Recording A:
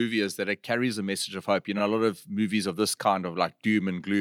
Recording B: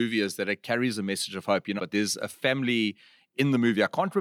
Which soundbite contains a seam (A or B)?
B